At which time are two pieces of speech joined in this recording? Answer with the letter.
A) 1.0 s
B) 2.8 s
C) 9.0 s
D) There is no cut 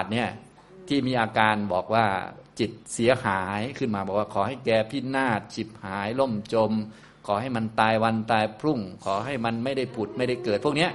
B